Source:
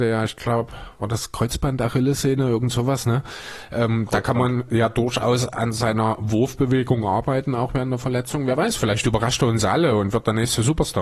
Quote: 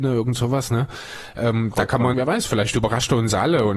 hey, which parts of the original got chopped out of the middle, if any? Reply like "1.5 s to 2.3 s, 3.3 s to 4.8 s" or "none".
4.5 s to 8.4 s

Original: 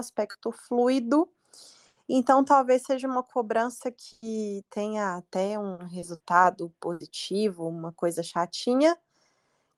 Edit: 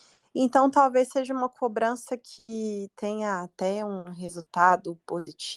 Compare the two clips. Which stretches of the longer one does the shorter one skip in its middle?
none

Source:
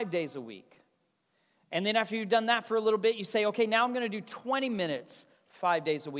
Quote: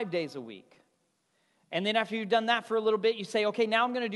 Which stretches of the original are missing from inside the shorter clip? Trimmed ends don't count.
none

